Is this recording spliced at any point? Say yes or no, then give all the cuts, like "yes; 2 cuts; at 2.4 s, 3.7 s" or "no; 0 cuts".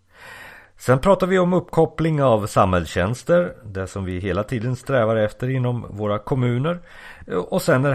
no; 0 cuts